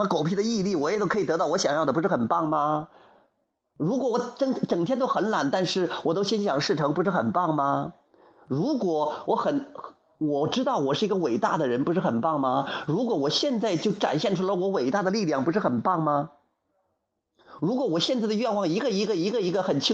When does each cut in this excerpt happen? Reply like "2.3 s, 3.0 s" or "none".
none